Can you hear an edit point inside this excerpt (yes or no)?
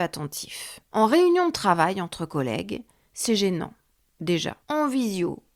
yes